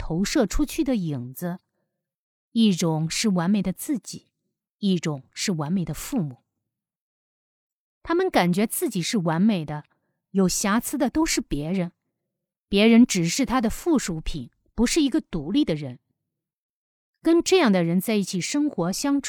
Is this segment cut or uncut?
uncut